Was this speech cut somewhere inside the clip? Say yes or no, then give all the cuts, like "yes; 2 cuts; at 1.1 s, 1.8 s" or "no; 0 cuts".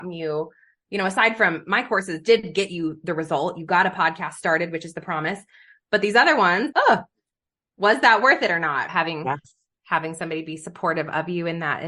yes; 2 cuts; at 6.7 s, 8.9 s